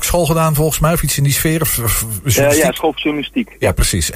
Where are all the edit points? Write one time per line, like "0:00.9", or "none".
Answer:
none